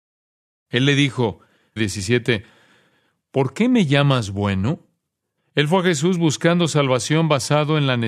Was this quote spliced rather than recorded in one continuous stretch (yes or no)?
yes